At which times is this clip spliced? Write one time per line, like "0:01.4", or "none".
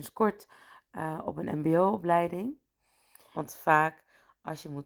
0:03.3